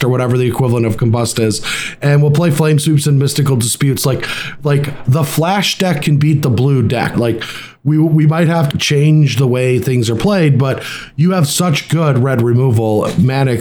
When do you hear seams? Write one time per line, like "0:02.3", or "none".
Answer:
0:07.1
0:08.7